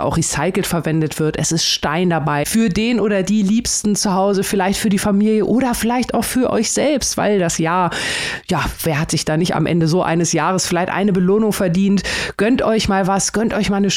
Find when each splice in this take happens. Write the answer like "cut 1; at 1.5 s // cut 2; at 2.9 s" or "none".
cut 1; at 2.4 s